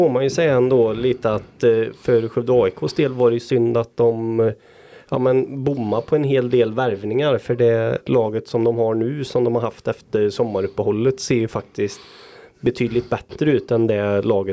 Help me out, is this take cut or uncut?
uncut